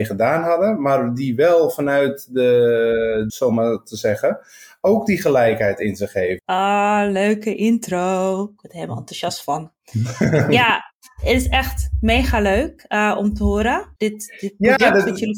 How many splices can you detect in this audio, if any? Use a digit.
3